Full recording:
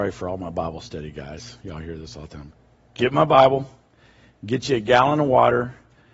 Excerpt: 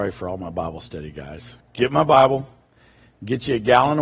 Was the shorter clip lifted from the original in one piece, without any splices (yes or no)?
no